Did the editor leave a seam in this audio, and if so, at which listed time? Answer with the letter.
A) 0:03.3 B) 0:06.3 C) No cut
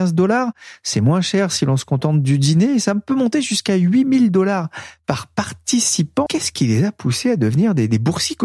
B